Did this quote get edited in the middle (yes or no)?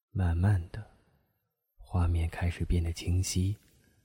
no